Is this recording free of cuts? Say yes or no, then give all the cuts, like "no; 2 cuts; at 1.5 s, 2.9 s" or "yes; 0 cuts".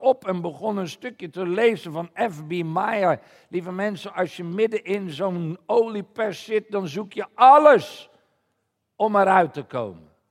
yes; 0 cuts